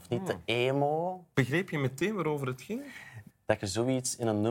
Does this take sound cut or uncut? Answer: cut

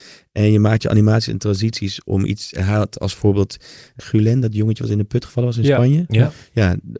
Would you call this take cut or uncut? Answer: cut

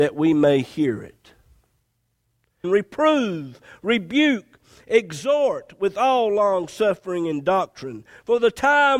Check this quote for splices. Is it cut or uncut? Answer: cut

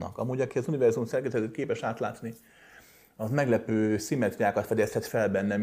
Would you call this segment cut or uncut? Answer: uncut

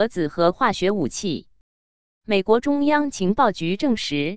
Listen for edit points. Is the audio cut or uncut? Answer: uncut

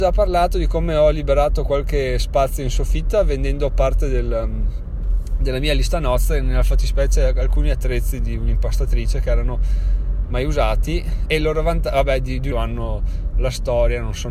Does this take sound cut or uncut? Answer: cut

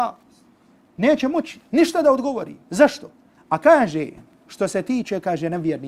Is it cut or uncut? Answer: cut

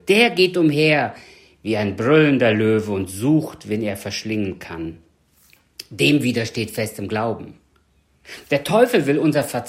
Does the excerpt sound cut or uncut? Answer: uncut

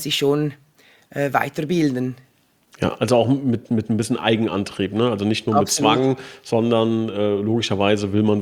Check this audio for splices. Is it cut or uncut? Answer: uncut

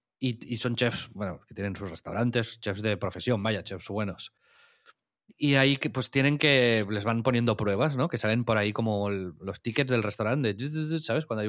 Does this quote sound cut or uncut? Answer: uncut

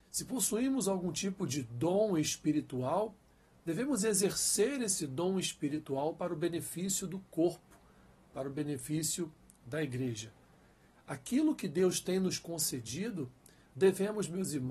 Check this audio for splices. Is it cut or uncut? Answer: cut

